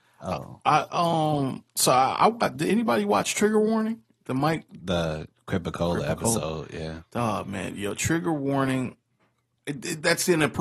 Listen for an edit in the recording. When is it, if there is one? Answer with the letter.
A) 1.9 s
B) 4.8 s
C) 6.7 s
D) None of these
B